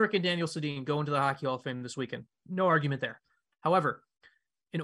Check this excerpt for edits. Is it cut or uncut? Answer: cut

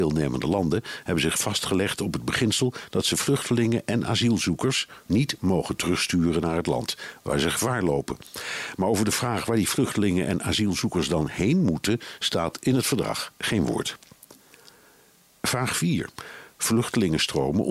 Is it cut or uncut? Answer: cut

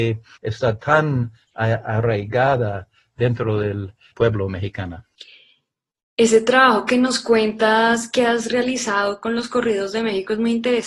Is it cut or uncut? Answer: cut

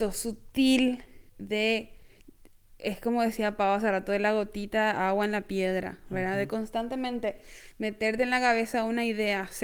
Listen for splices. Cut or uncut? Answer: uncut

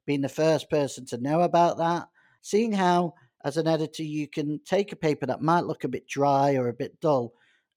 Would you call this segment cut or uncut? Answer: cut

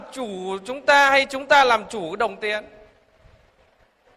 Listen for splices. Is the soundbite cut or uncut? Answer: uncut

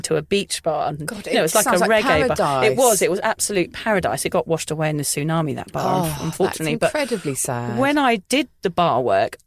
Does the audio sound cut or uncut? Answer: uncut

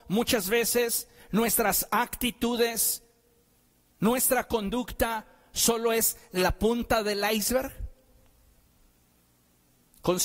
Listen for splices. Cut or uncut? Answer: uncut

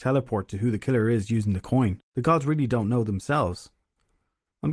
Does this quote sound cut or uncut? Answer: cut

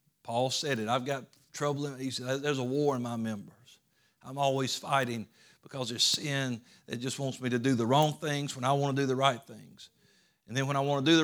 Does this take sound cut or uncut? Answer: uncut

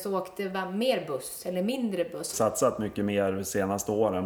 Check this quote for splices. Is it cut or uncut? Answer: cut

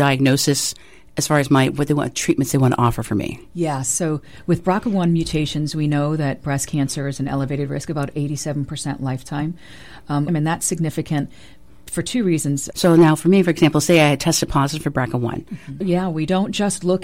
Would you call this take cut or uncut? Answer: cut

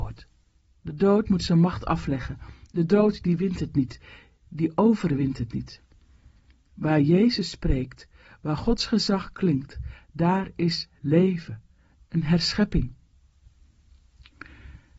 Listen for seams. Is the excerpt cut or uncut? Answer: uncut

